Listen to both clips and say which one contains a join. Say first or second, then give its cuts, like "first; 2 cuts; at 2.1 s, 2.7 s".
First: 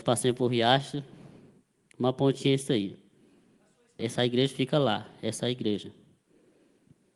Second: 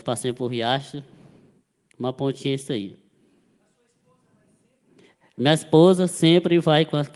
first; 1 cut; at 4.0 s